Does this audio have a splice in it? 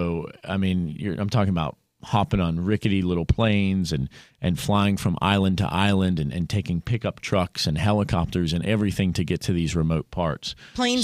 no; 0 cuts

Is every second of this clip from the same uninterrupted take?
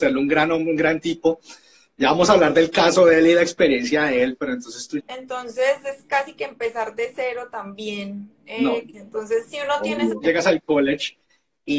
no; 3 cuts; at 5.0 s, 8.9 s, 10.2 s

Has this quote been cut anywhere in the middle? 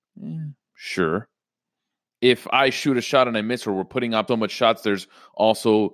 yes; 1 cut; at 4.3 s

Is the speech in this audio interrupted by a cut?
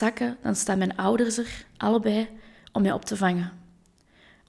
no; 0 cuts

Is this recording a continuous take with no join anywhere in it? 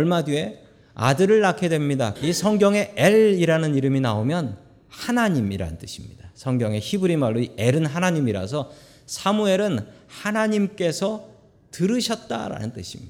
no; 1 cut; at 2.2 s

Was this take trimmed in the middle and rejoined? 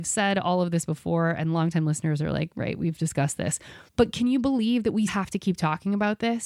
yes; 2 cuts; at 3.9 s, 5.1 s

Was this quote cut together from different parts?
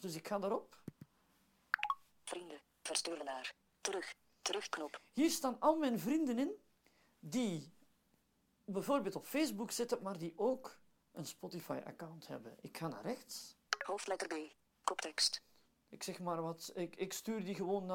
yes; 1 cut; at 13.7 s

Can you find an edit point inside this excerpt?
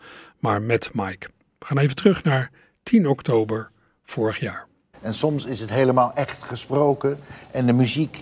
yes; 1 cut; at 4.9 s

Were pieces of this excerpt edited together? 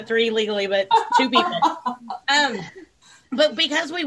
no; 0 cuts

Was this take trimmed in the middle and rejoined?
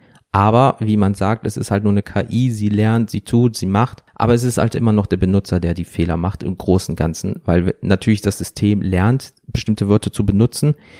no; 0 cuts

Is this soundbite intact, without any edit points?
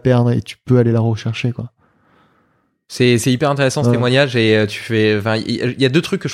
yes; 0 cuts

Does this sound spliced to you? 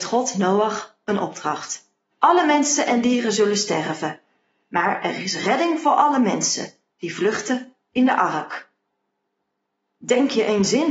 yes; 1 cut; at 2.1 s

